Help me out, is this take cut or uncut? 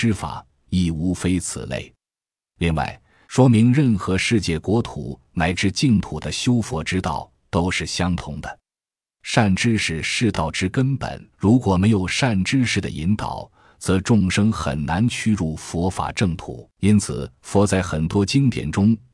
cut